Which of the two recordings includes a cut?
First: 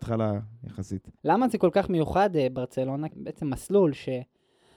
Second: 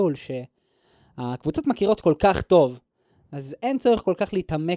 first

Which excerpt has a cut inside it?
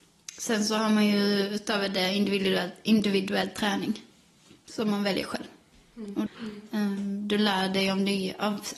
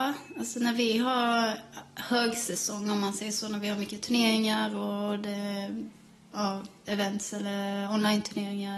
first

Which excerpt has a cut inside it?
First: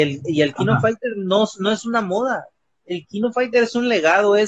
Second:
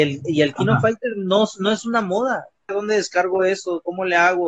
second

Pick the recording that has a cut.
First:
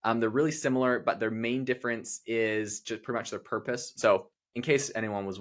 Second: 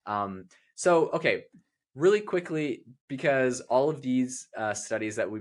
first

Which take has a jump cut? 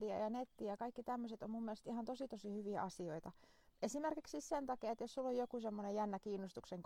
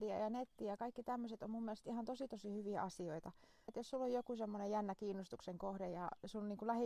second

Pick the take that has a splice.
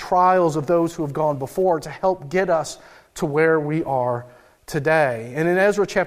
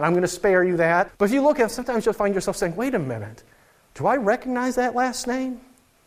second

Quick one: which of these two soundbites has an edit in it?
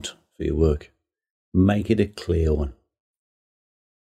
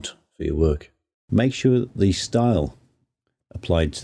second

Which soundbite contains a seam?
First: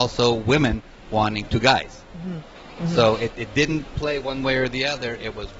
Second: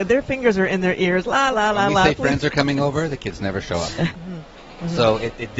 second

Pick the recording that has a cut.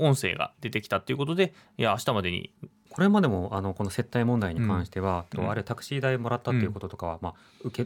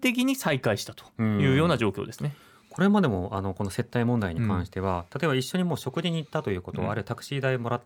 first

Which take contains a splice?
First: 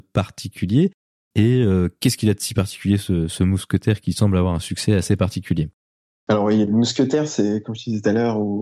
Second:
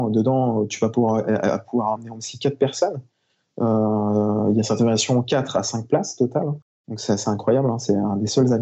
second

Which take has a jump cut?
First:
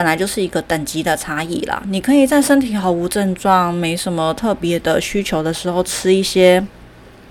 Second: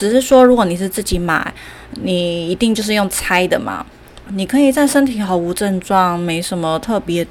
second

